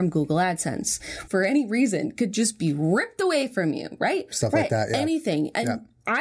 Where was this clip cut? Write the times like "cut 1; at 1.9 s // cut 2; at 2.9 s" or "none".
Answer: cut 1; at 1.3 s // cut 2; at 4.3 s